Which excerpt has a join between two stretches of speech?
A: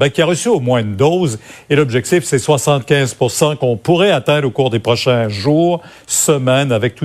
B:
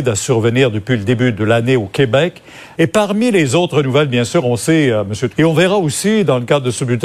B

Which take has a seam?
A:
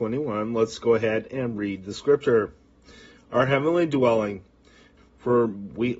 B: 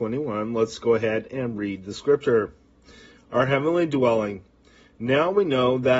A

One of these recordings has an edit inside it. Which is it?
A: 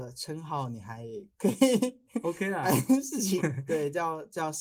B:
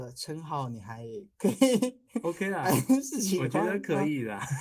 A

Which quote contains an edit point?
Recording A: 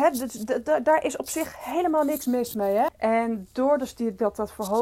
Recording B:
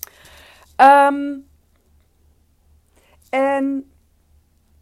A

